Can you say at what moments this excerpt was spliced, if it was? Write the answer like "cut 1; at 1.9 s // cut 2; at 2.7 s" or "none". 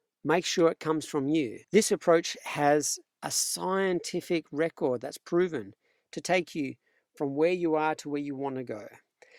cut 1; at 1.6 s